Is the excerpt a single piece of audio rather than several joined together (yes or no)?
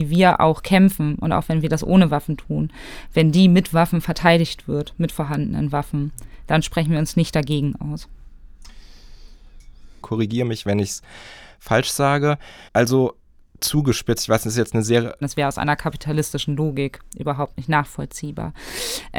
no